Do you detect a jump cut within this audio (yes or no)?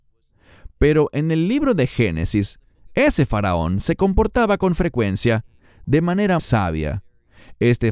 yes